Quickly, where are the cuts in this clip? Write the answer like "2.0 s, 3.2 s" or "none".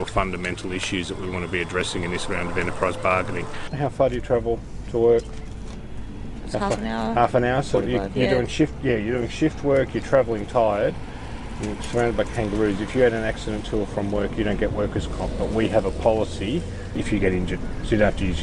none